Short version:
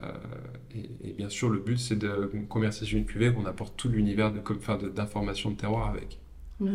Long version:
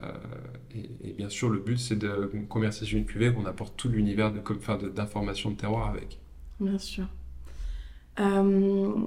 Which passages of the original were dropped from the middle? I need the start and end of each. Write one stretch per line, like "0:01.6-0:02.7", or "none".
none